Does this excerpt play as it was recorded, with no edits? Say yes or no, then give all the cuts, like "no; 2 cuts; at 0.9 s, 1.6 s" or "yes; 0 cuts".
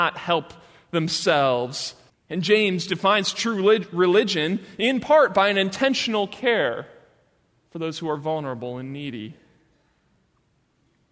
no; 1 cut; at 2.1 s